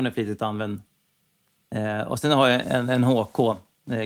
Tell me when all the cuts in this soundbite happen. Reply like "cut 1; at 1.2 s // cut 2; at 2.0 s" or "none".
cut 1; at 2.6 s